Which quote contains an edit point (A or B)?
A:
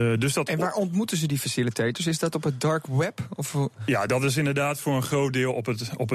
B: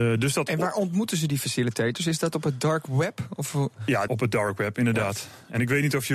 B